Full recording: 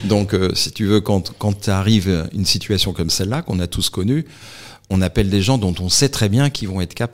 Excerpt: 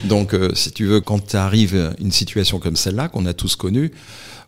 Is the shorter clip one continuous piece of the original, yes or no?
no